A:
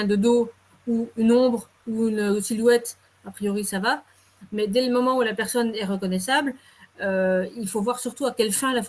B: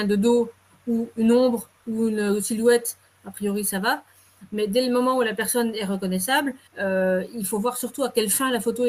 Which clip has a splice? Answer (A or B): B